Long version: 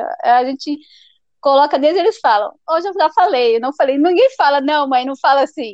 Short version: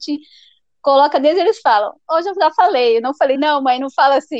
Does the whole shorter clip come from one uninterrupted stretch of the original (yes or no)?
no